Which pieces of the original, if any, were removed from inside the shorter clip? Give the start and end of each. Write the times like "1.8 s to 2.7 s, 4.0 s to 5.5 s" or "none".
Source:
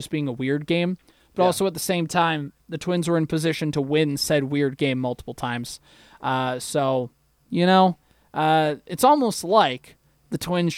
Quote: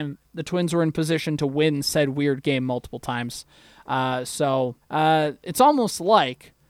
7.2 s to 8.2 s